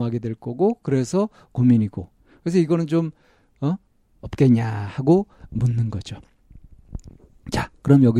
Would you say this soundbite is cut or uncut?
cut